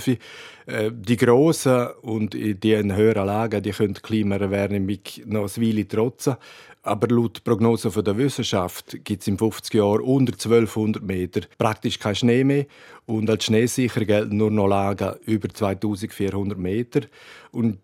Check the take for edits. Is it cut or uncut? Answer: cut